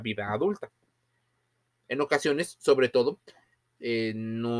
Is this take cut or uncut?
cut